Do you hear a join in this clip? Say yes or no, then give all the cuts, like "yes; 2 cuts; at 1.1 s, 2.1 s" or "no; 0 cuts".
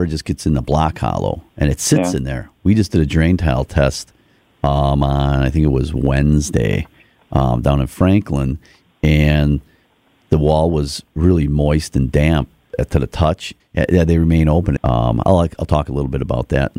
yes; 2 cuts; at 13.6 s, 14.8 s